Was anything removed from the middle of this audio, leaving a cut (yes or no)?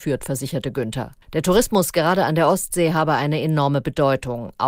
yes